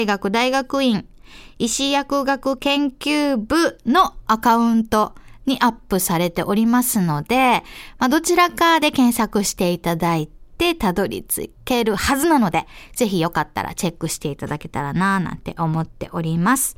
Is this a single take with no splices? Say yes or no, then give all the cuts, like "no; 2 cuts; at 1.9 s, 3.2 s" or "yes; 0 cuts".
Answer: yes; 0 cuts